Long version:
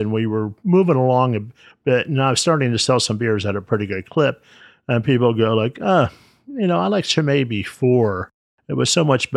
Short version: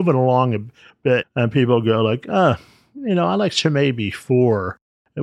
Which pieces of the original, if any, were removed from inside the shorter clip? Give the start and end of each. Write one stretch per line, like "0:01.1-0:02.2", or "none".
0:02.0-0:04.8